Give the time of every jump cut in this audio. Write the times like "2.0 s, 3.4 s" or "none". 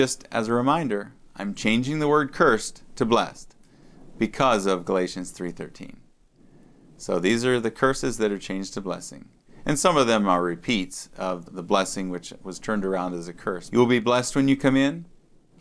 11.5 s, 13.7 s